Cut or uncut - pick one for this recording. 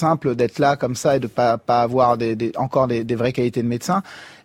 uncut